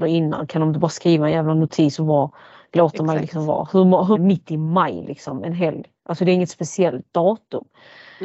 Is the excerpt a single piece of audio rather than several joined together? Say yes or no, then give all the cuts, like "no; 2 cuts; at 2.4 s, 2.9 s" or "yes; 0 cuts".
no; 1 cut; at 4.1 s